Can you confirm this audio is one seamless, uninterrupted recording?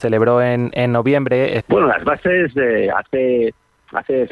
no; 1 cut; at 1.6 s

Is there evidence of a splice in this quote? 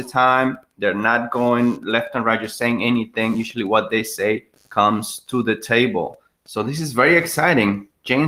no; 0 cuts

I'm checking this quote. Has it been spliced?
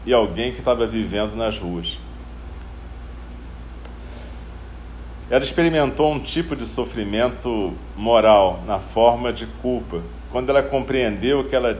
yes; 1 cut; at 5.2 s

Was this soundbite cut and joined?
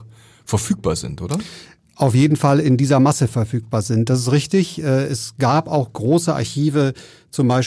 no; 0 cuts

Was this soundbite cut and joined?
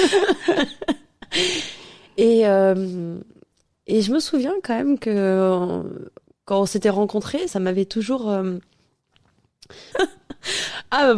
yes; 2 cuts; at 7.5 s, 9.9 s

